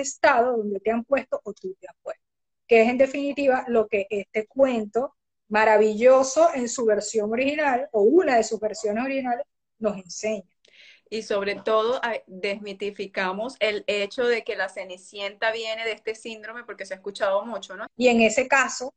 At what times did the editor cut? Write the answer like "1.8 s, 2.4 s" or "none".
17.9 s